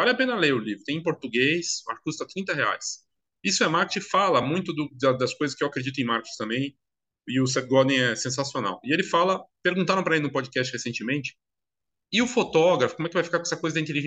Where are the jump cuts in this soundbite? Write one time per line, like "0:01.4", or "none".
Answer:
none

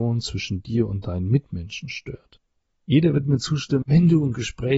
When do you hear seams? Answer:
0:03.8

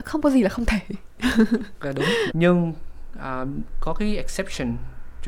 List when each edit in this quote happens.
0:02.3

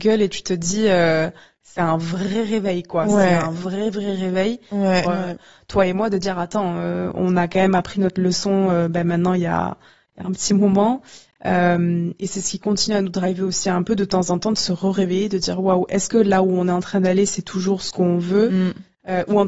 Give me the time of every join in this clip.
0:05.0

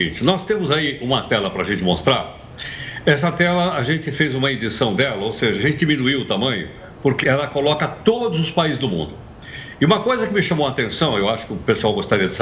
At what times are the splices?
0:07.2

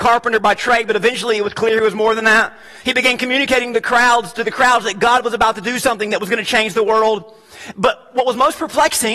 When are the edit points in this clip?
none

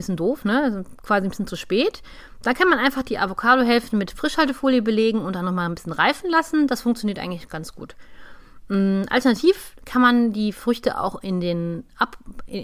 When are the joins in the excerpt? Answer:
none

